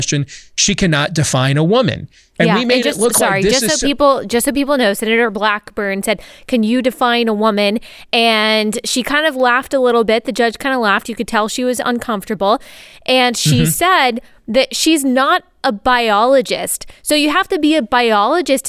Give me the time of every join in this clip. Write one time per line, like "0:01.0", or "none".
none